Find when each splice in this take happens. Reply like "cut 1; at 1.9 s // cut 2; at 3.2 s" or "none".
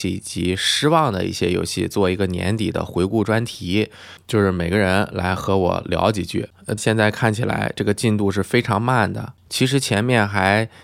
cut 1; at 6.8 s // cut 2; at 9.5 s